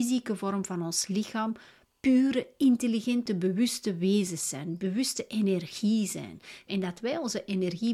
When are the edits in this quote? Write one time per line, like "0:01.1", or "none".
0:06.7